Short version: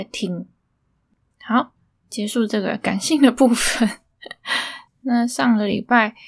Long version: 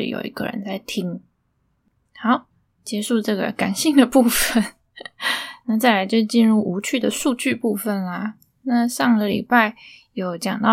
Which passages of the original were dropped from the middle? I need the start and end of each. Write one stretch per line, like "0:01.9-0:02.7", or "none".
0:05.6-0:08.5